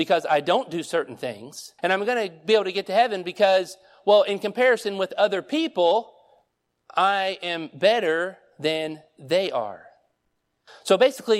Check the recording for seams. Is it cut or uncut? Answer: cut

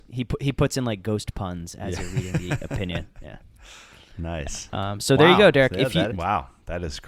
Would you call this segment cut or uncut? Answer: cut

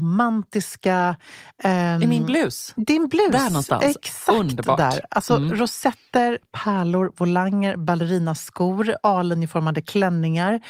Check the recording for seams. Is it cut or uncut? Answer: uncut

